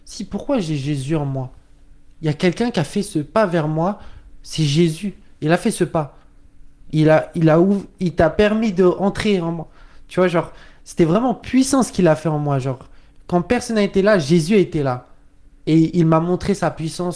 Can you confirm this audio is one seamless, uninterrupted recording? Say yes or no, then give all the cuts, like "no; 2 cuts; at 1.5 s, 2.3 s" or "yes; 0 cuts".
yes; 0 cuts